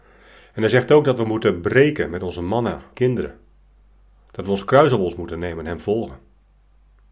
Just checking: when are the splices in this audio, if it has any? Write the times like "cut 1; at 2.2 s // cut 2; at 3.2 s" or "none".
cut 1; at 2.9 s